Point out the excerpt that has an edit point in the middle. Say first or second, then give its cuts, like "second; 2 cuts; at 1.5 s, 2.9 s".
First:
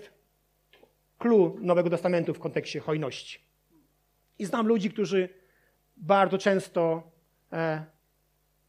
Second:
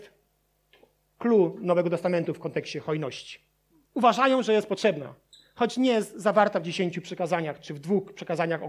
second; 1 cut; at 3.8 s